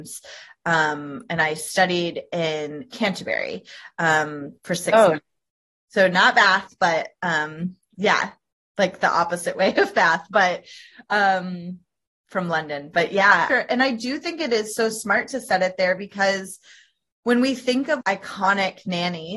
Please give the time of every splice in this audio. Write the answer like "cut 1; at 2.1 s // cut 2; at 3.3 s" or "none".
cut 1; at 13.5 s // cut 2; at 18.0 s